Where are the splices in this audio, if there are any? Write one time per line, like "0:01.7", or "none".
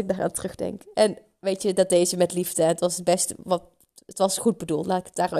none

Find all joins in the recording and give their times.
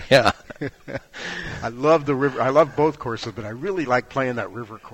none

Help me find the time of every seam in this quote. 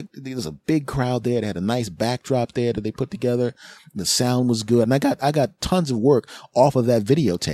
0:04.8

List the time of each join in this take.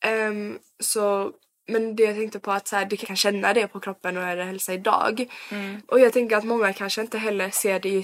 0:03.0
0:05.8

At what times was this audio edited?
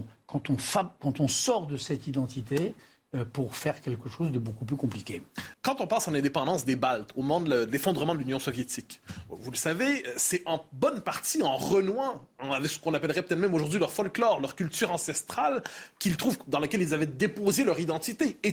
0:05.5

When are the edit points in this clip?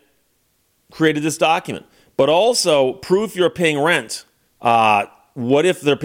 0:02.1
0:04.5

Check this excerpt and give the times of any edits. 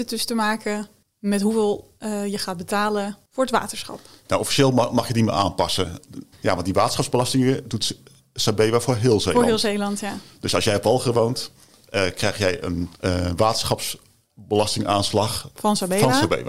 0:04.2
0:06.3
0:12.9

